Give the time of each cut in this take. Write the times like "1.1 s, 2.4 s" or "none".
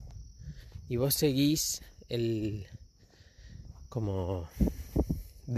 none